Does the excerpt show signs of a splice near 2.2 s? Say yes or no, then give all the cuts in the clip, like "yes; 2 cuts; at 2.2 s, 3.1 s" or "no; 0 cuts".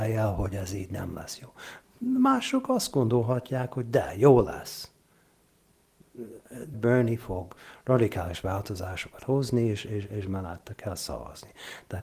no; 1 cut; at 6.7 s